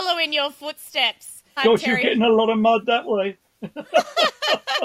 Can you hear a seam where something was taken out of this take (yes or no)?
yes